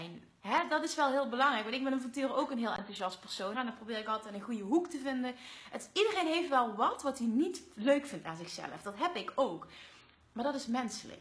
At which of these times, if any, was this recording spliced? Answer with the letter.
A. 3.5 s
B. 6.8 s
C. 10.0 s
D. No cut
A